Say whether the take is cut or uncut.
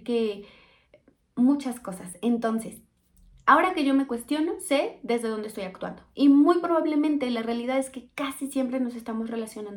uncut